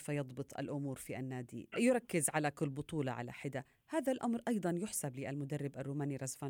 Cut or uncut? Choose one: cut